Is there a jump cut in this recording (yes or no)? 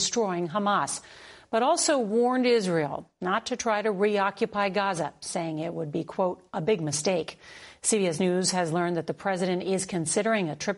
no